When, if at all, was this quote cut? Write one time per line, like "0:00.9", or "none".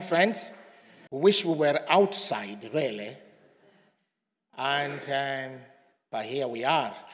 0:01.1